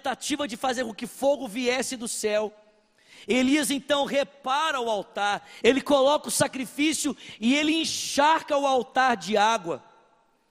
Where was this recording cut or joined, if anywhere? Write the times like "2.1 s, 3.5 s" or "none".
5.6 s